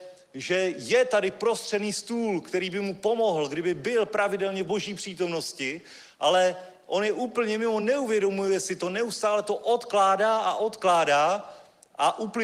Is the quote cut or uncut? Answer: uncut